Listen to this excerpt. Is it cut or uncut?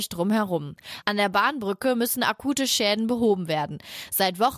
uncut